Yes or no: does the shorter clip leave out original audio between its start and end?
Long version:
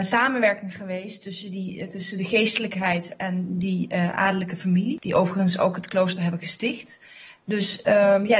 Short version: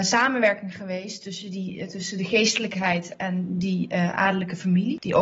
no